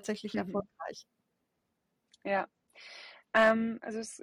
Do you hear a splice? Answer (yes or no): no